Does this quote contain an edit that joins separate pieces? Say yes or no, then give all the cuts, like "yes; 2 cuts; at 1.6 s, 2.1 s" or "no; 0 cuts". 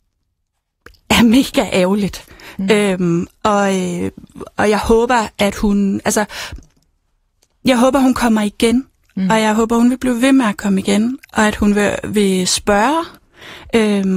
no; 0 cuts